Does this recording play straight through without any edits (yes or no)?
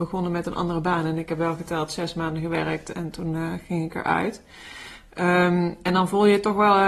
yes